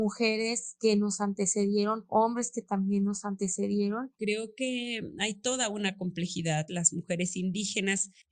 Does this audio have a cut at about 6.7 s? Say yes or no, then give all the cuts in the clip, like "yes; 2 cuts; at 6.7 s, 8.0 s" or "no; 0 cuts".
yes; 2 cuts; at 4.2 s, 6.7 s